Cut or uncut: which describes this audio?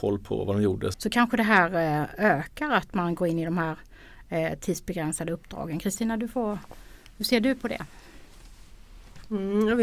cut